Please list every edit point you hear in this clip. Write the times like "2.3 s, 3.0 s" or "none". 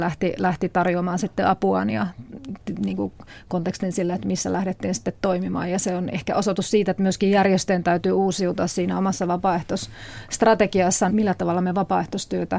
11.1 s

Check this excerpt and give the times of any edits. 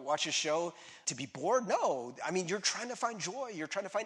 1.0 s

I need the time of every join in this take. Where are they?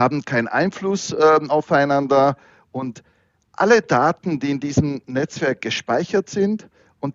none

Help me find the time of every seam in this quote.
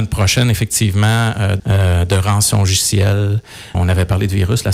1.6 s, 3.7 s

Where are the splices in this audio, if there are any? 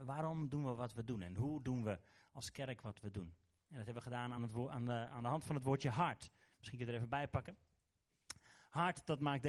none

